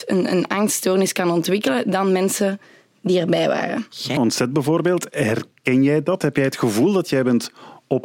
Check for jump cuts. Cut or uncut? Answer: cut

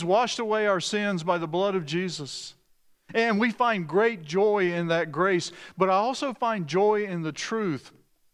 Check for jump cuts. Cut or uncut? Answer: uncut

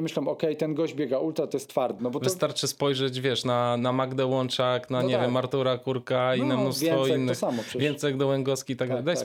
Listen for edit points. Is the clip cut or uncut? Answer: cut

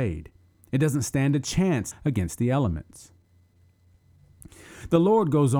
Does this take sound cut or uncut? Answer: cut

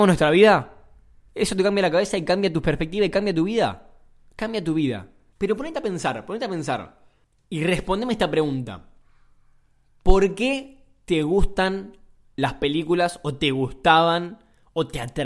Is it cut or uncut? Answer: cut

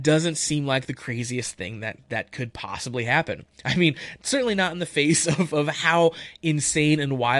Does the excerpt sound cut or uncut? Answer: uncut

